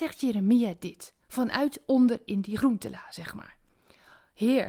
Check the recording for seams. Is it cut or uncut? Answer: uncut